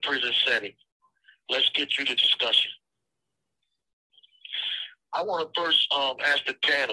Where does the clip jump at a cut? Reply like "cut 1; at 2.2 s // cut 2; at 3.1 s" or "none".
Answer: none